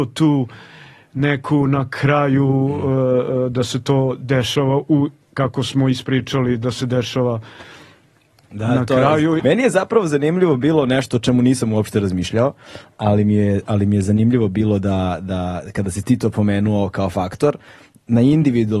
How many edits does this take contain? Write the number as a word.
one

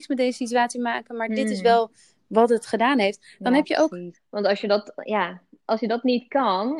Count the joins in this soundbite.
one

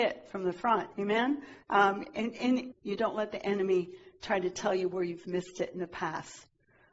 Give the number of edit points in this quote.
two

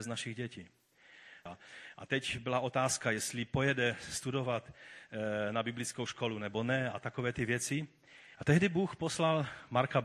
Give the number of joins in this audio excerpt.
two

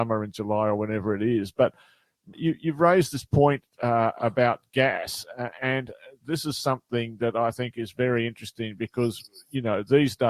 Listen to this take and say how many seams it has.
one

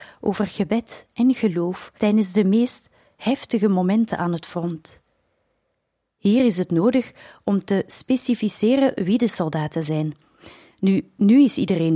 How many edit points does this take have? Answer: one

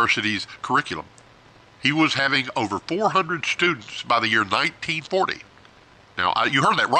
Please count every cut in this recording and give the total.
zero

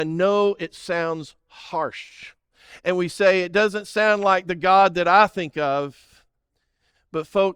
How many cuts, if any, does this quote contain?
zero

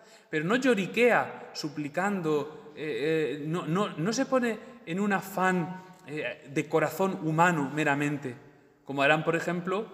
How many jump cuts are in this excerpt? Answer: zero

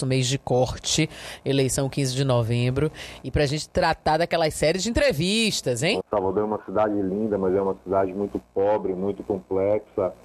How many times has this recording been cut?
one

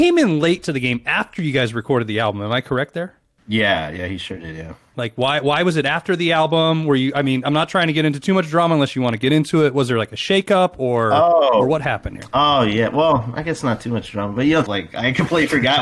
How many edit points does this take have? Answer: two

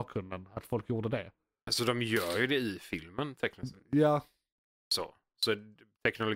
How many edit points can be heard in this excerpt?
one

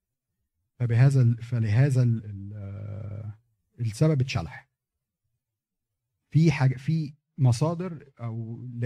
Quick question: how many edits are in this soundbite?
one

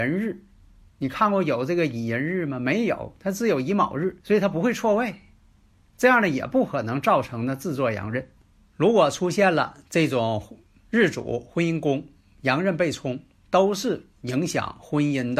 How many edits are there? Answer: one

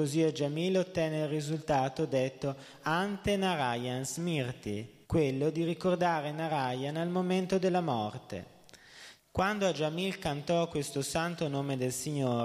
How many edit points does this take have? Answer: two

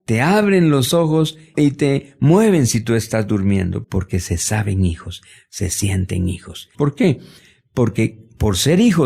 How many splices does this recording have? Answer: two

